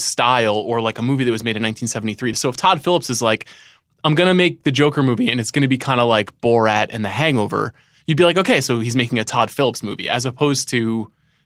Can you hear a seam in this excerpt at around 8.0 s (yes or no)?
no